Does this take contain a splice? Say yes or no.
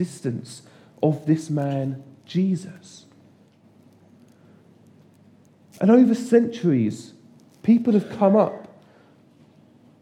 no